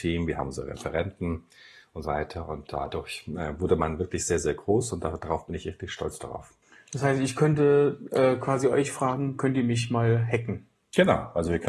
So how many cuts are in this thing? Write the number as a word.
one